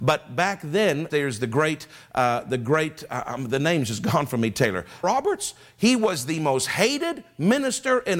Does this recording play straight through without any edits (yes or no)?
no